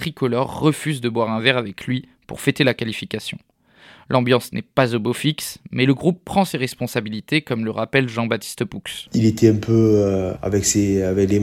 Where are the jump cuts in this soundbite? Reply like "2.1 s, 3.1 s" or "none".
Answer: 9.1 s, 10.4 s